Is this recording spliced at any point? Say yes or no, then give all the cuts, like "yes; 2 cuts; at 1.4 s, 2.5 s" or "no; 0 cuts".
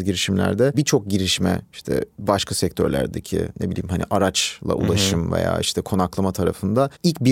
no; 0 cuts